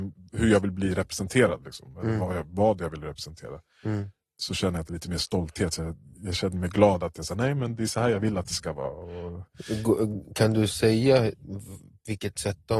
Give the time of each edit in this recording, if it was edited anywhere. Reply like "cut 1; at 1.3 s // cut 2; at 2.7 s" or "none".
cut 1; at 6.1 s